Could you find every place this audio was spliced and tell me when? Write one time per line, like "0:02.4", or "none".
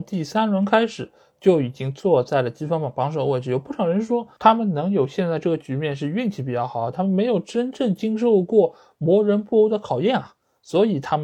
0:06.9